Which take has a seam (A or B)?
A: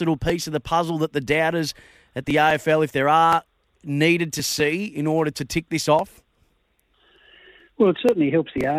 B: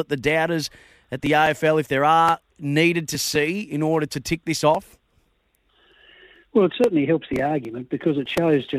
B